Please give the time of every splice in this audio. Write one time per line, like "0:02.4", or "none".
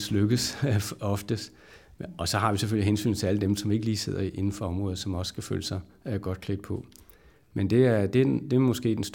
none